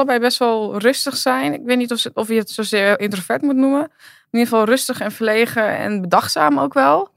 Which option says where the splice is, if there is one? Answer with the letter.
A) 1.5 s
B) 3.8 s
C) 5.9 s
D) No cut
D